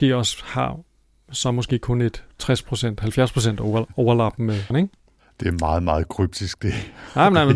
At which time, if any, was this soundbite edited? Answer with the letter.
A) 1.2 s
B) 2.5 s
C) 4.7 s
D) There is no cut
C